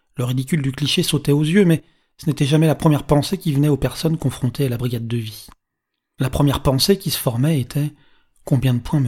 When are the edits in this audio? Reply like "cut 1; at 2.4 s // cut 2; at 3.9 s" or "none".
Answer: none